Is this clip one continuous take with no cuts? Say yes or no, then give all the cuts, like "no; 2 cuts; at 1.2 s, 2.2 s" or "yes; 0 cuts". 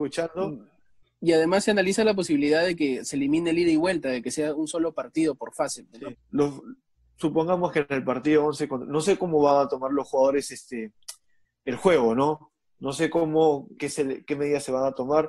no; 2 cuts; at 6.1 s, 13.8 s